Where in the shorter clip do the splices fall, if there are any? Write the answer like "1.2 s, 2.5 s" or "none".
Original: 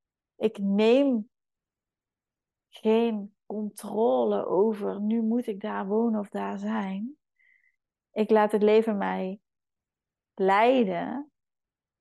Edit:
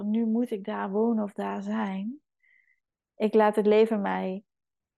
none